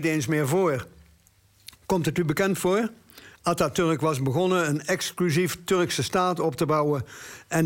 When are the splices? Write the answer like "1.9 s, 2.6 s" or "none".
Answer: none

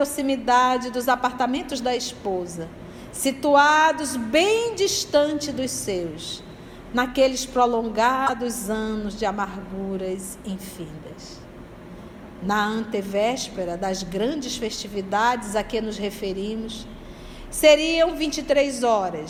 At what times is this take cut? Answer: none

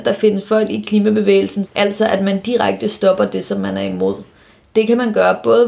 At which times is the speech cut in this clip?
1.6 s

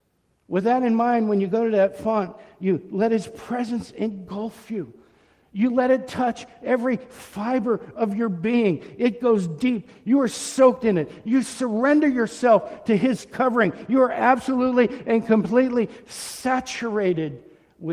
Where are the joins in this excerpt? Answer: none

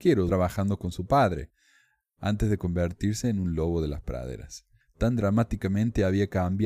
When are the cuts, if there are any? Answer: 4.8 s

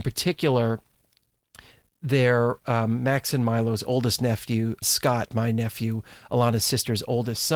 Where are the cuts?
4.8 s

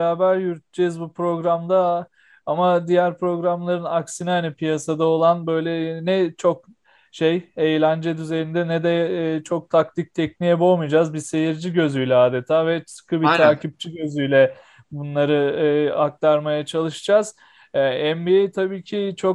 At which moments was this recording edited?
none

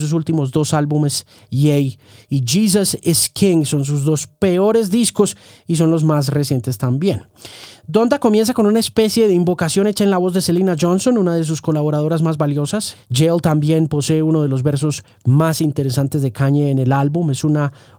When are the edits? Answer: 12.9 s

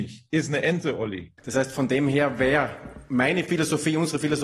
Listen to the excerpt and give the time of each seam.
1.4 s

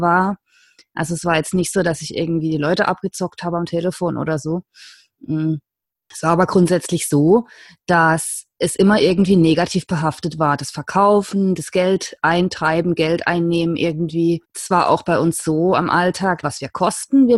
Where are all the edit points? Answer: 14.4 s, 16.4 s

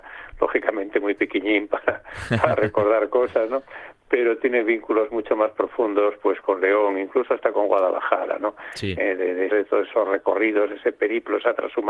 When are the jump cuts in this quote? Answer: 9.5 s

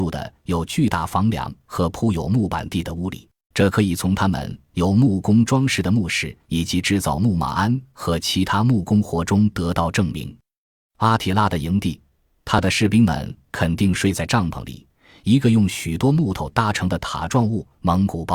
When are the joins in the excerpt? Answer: 3.5 s

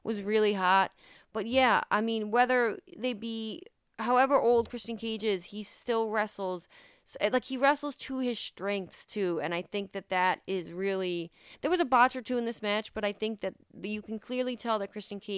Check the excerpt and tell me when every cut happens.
none

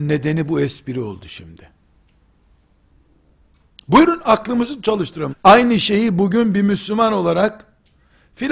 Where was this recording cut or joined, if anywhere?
5.3 s

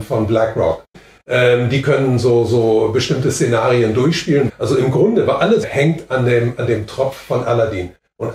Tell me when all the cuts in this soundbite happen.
0.9 s, 4.5 s, 5.6 s

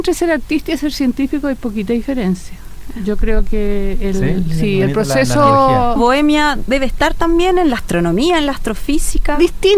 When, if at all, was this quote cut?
6.0 s

